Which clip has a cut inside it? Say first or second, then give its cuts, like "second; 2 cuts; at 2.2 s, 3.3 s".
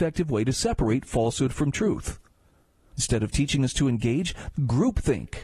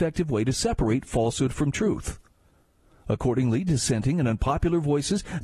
first; 2 cuts; at 2.9 s, 4.5 s